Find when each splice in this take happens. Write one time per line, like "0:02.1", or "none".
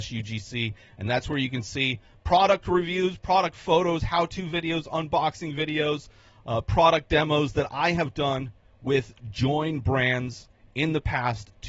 none